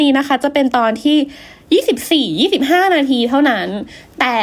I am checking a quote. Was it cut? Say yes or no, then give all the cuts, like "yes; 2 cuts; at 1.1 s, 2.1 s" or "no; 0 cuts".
no; 0 cuts